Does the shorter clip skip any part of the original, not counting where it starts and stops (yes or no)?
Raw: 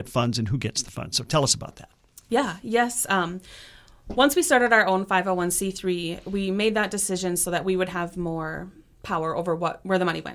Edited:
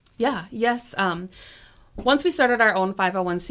no